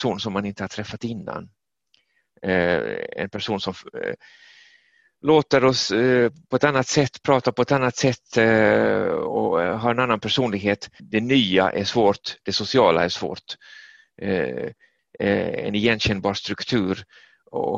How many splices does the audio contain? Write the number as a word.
two